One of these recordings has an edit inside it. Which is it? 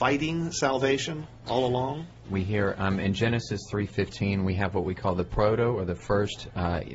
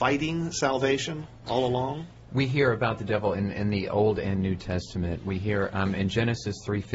first; 1 cut; at 2.2 s

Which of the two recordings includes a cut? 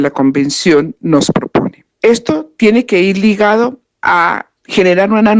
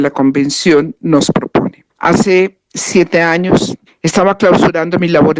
second; 1 cut; at 1.9 s

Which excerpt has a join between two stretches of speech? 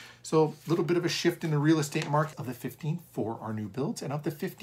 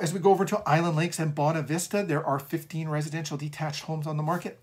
first; 1 cut; at 2.3 s

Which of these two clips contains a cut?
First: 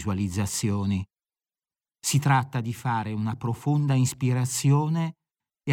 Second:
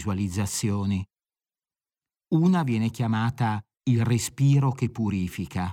first; 1 cut; at 1.8 s

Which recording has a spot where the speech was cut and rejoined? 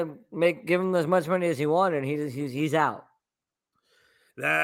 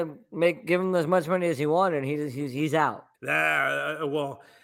second; 1 cut; at 3.1 s

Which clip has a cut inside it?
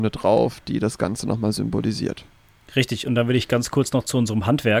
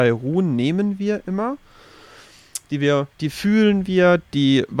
second; 1 cut; at 3.1 s

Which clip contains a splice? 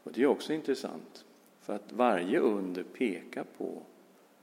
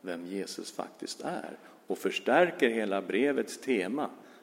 first; 1 cut; at 1.5 s

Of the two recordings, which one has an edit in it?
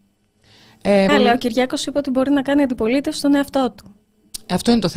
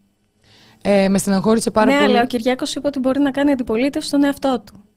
first; 1 cut; at 1.1 s

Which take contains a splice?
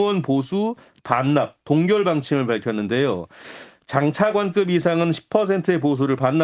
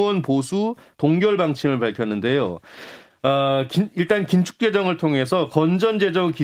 second; 2 cuts; at 0.9 s, 3.1 s

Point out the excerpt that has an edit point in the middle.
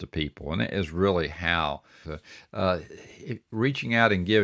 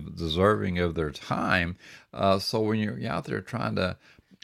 first; 1 cut; at 2.0 s

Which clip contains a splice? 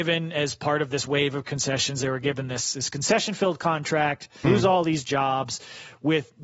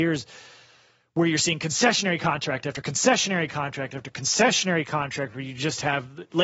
first; 1 cut; at 4.4 s

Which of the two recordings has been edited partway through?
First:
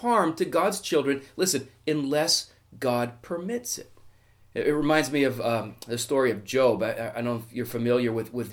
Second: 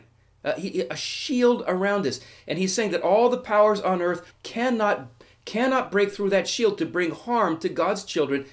second; 1 cut; at 4.3 s

